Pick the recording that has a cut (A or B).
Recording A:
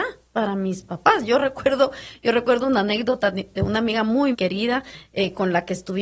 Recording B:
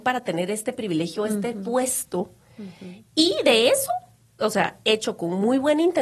A